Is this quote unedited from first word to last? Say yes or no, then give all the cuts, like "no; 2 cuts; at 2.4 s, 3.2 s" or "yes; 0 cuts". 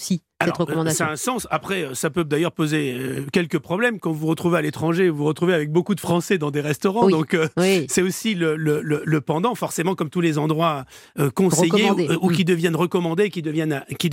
yes; 0 cuts